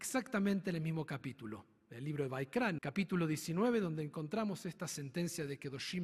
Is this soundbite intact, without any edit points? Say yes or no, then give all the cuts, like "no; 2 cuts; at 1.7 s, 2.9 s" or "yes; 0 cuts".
no; 1 cut; at 2.8 s